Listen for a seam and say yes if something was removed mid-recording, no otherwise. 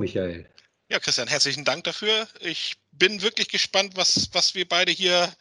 no